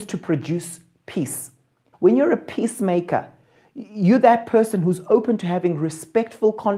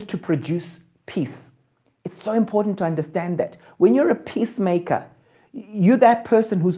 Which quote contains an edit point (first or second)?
first